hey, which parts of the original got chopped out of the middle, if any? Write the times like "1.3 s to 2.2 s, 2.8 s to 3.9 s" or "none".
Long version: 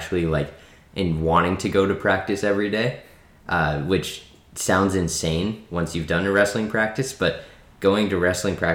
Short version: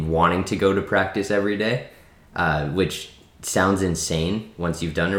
none